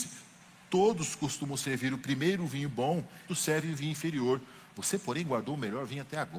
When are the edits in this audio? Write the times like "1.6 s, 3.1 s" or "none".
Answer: 2.0 s, 3.3 s